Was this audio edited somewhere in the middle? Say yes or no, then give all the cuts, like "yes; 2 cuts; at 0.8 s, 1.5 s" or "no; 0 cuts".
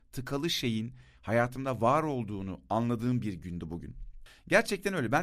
yes; 1 cut; at 4.3 s